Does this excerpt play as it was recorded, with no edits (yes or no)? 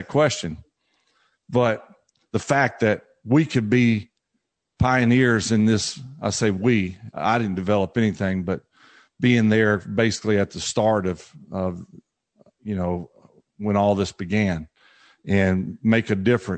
yes